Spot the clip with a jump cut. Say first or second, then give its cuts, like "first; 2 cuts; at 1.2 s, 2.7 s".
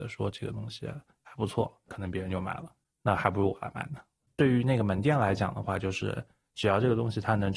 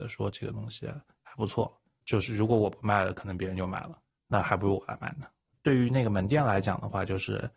first; 1 cut; at 1.9 s